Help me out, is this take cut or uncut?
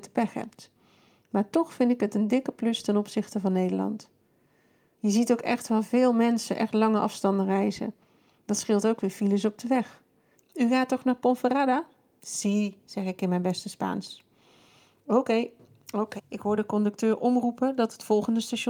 cut